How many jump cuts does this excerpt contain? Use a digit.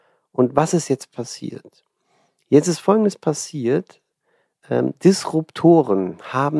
0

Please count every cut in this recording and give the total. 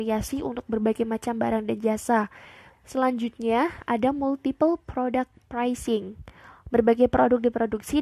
2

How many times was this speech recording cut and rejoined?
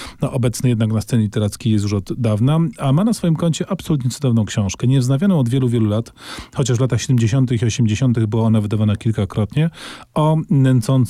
0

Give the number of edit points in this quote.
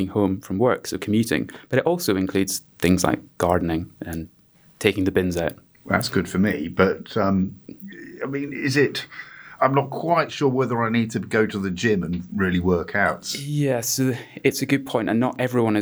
1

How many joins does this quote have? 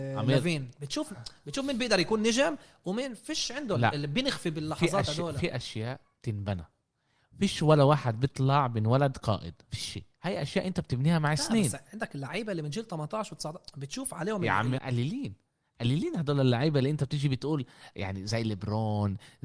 1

